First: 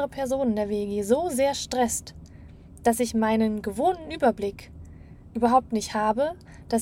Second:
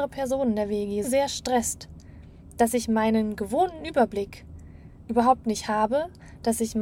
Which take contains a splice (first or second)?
second